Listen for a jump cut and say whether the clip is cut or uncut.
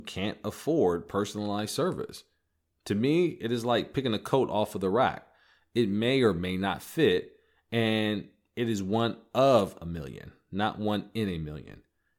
uncut